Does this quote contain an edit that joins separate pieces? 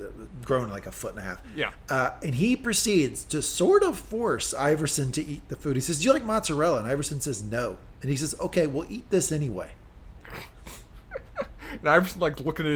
no; 0 cuts

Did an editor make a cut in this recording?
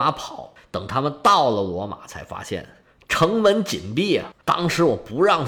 yes; 1 cut; at 4.4 s

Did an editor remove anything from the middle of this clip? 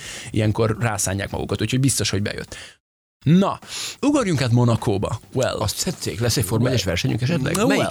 no; 0 cuts

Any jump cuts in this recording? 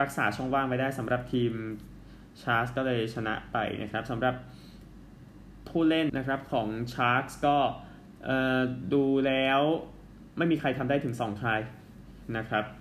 yes; 1 cut; at 6.1 s

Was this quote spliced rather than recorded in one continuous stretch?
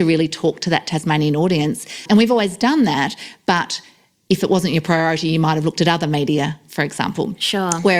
no; 0 cuts

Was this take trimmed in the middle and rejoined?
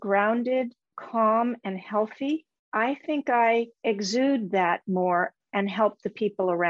no; 0 cuts

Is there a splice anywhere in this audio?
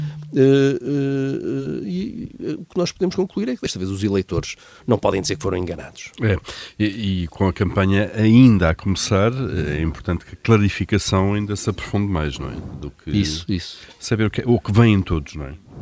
no; 0 cuts

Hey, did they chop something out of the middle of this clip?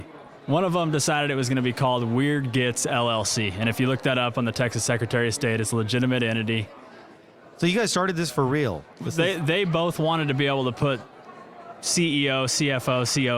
no; 0 cuts

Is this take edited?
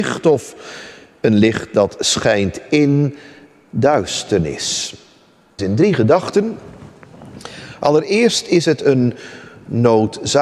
yes; 1 cut; at 5.6 s

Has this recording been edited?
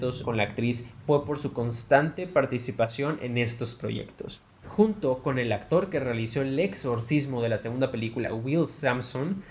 yes; 1 cut; at 4.6 s

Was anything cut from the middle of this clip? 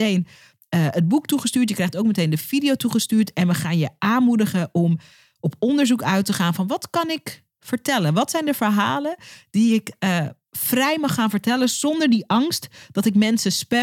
no; 0 cuts

